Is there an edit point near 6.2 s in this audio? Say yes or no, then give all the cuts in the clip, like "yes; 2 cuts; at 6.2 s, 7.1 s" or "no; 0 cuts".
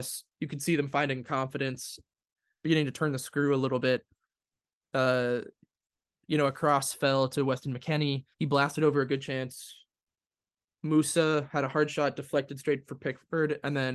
no; 1 cut; at 8.3 s